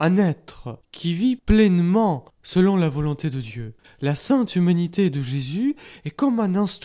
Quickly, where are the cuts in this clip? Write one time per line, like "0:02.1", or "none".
0:03.8